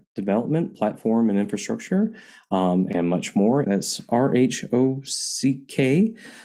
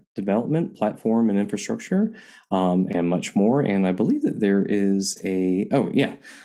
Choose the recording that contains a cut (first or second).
first